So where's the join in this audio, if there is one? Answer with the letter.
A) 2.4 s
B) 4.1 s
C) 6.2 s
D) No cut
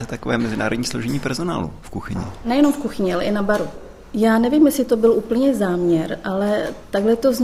D